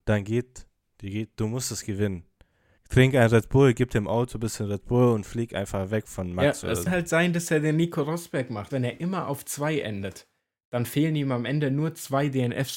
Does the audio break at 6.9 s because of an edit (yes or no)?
yes